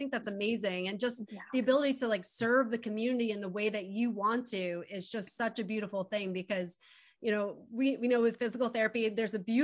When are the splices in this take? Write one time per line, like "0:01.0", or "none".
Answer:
none